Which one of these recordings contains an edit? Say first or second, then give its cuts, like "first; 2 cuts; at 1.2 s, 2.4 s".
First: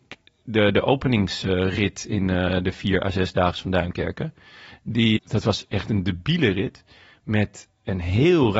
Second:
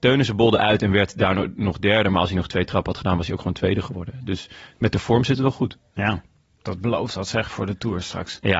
first; 1 cut; at 5.2 s